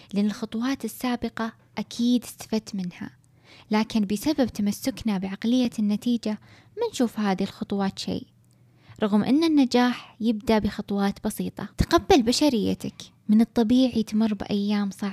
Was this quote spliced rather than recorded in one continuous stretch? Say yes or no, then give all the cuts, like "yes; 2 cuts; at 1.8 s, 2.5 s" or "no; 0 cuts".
yes; 1 cut; at 11.7 s